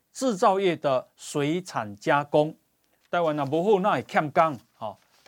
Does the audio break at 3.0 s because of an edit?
yes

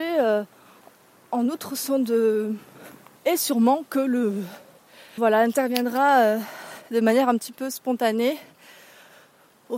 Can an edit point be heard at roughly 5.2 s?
yes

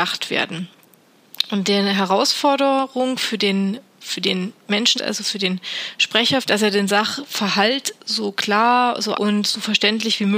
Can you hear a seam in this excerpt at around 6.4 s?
yes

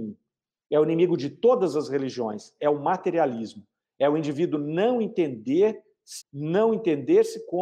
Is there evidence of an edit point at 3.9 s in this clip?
no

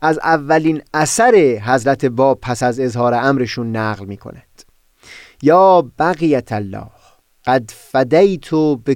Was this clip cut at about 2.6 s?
no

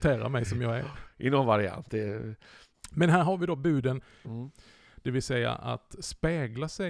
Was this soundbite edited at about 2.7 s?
yes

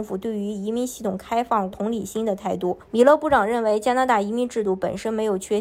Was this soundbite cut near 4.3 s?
no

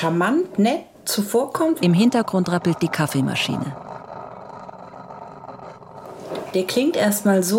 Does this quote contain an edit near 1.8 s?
yes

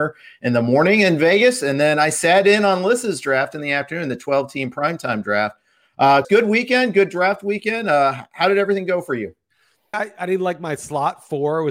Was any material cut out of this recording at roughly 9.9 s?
yes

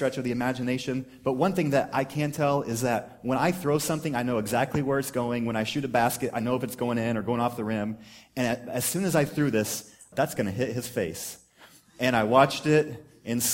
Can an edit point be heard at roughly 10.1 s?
yes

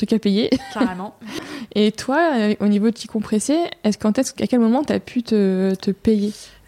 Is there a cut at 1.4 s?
yes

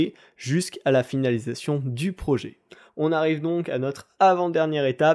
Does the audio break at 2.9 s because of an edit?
no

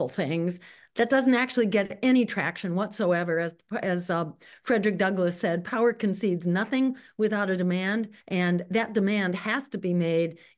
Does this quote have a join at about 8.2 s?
yes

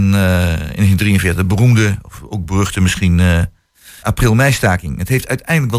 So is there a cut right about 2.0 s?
no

